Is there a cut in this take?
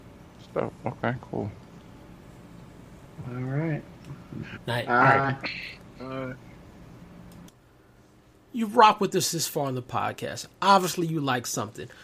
yes; 1 cut; at 4.5 s

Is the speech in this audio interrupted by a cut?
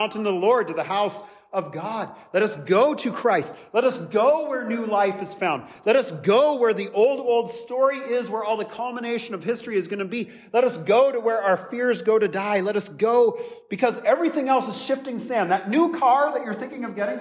no; 0 cuts

